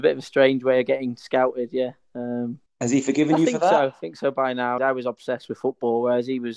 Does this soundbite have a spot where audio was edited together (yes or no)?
yes